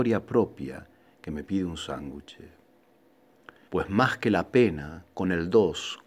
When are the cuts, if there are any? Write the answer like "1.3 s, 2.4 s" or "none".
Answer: 3.7 s